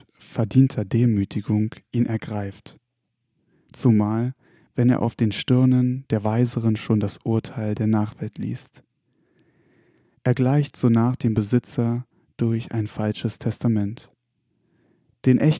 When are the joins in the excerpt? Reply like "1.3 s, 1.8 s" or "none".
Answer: none